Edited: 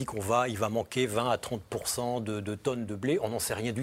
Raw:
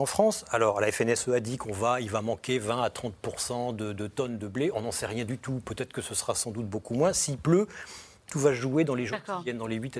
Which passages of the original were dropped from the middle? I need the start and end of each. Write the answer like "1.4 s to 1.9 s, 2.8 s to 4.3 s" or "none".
none